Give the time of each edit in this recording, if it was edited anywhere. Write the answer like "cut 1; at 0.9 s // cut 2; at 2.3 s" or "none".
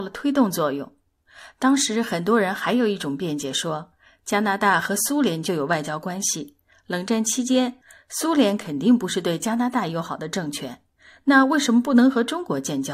none